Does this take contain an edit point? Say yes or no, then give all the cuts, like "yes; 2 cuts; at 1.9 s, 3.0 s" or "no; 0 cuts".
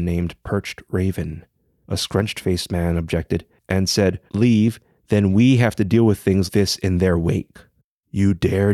yes; 2 cuts; at 4.3 s, 6.5 s